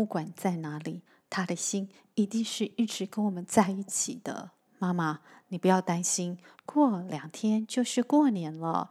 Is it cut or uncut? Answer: cut